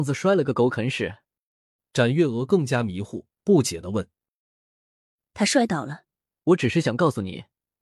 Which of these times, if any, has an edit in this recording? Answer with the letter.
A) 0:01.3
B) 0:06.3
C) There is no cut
B